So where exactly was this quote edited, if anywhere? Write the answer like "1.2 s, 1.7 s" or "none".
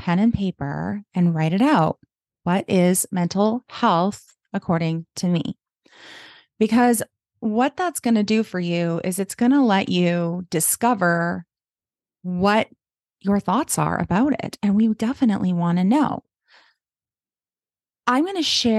none